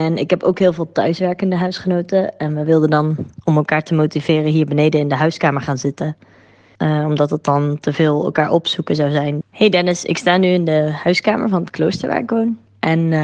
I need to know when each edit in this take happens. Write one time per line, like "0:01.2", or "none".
0:06.8
0:09.4